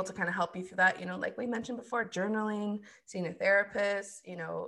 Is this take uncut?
yes; 0 cuts

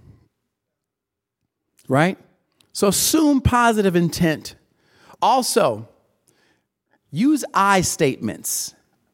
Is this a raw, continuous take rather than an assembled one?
yes; 0 cuts

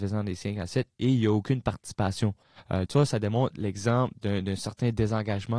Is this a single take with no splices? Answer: no; 1 cut; at 2.9 s

